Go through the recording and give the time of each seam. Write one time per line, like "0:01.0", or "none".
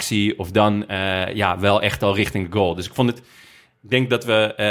none